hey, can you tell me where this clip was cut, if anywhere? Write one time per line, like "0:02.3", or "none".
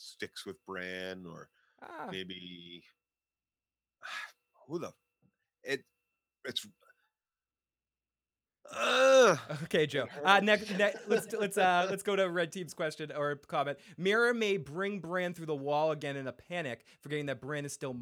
none